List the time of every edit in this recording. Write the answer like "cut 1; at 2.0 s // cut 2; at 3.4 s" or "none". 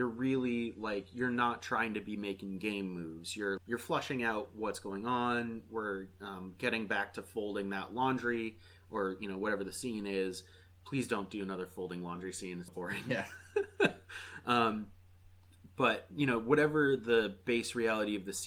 cut 1; at 3.6 s // cut 2; at 12.7 s

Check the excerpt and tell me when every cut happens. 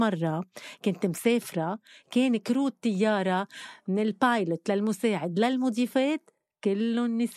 none

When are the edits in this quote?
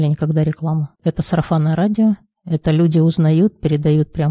cut 1; at 1.0 s

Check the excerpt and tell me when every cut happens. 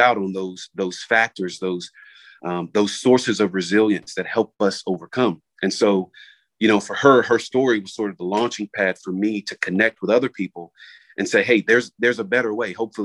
none

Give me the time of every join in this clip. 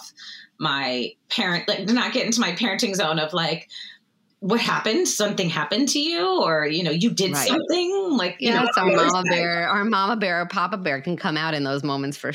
none

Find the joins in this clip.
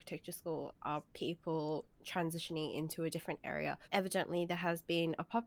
cut 1; at 3.8 s

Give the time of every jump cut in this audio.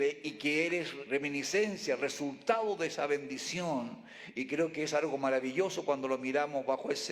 cut 1; at 1.1 s

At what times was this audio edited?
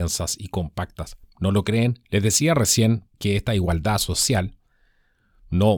cut 1; at 2.0 s // cut 2; at 3.1 s

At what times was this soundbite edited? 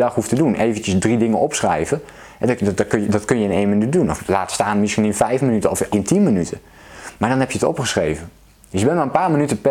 cut 1; at 5.9 s

